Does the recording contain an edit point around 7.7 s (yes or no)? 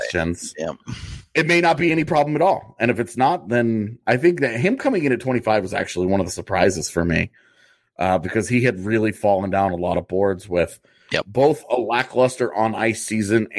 no